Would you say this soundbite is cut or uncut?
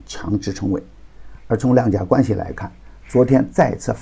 cut